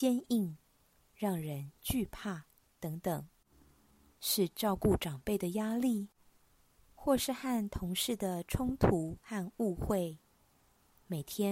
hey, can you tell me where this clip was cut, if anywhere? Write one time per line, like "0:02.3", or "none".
0:04.1